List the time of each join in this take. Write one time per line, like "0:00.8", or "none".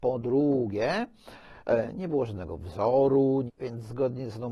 0:03.5

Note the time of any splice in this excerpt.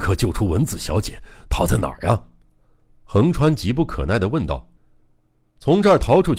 0:04.8

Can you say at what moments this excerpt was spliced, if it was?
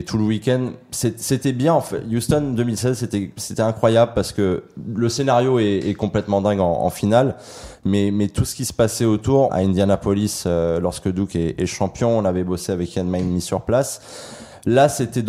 0:09.5

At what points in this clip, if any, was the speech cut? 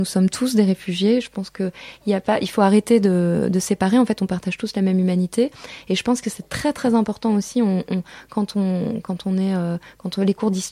none

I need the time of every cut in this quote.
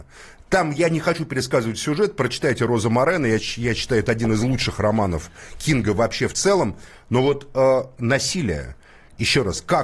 none

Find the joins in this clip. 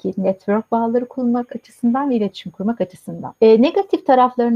0:03.4

